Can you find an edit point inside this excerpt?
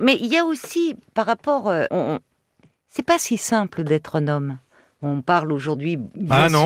yes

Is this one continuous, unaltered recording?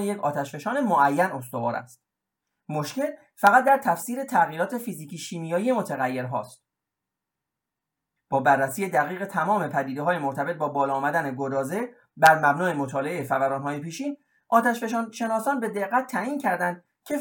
no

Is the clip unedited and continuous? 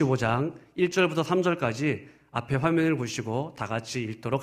yes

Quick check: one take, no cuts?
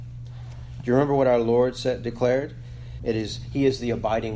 no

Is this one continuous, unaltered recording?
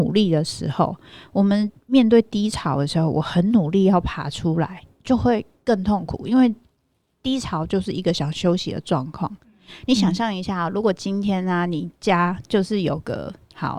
yes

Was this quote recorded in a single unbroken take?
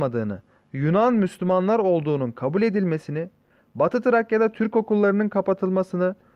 yes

